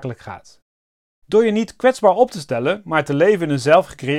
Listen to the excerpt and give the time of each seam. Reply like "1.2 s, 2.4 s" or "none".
none